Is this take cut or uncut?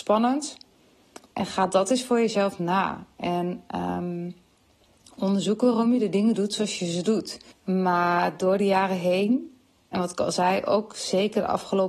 cut